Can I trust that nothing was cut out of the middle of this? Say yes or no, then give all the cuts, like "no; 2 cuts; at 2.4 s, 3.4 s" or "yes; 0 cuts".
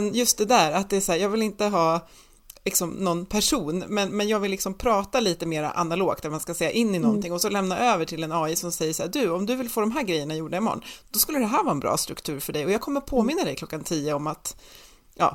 no; 1 cut; at 3.9 s